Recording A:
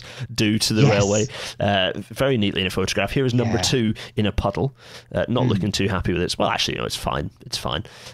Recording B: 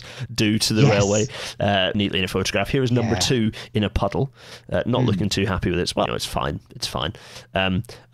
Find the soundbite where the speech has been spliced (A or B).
B